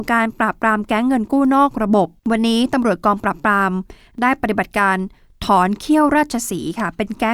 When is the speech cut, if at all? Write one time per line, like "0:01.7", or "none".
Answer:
0:02.2